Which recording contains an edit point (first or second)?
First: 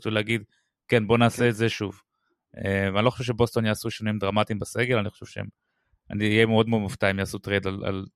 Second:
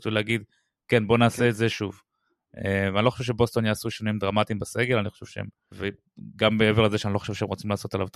second